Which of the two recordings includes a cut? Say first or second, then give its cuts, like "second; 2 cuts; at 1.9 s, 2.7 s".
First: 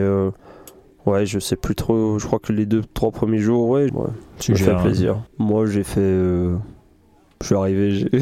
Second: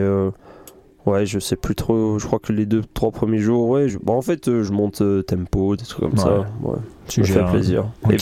first; 2 cuts; at 3.9 s, 5.3 s